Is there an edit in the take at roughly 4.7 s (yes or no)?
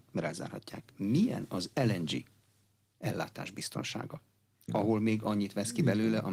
yes